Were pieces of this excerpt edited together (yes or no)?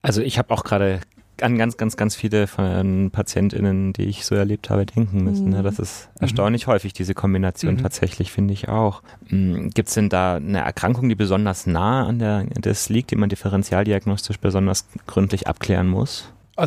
yes